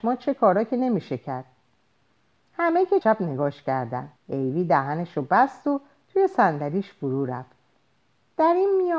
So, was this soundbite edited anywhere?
yes; 2 cuts; at 3.0 s, 4.2 s

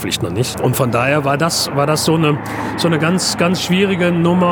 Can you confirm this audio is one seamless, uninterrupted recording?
yes; 0 cuts

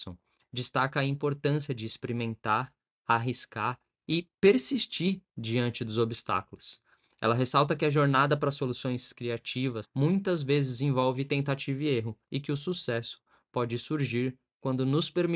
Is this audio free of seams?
no; 2 cuts; at 9.8 s, 12.2 s

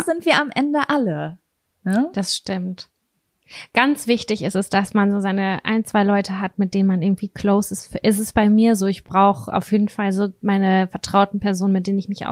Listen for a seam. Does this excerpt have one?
no; 0 cuts

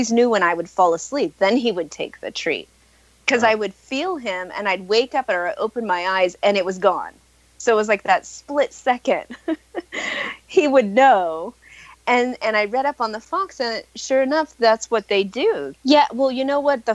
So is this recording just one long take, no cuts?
no; 1 cut; at 15.7 s

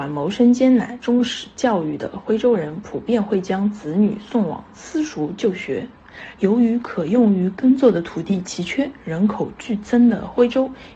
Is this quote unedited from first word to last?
no; 2 cuts; at 1.0 s, 6.3 s

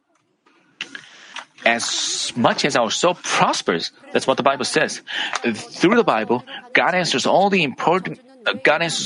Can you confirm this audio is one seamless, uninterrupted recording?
yes; 0 cuts

